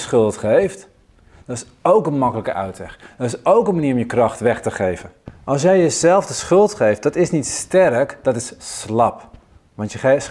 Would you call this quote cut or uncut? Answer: uncut